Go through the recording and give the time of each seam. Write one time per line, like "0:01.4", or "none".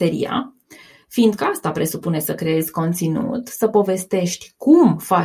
none